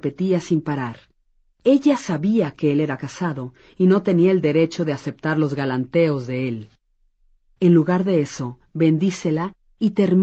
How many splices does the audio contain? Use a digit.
1